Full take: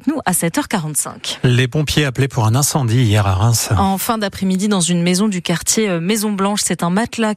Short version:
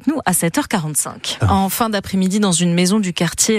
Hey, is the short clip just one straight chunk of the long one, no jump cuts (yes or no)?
no